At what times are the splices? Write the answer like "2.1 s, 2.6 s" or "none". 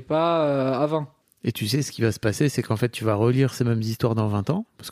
1.2 s